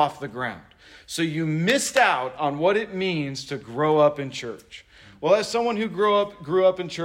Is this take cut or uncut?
uncut